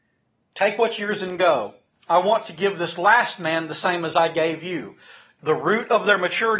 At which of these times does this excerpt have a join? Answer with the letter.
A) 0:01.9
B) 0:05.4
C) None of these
B